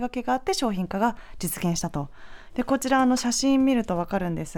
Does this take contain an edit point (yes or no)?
yes